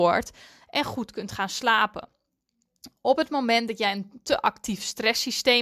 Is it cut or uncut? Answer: uncut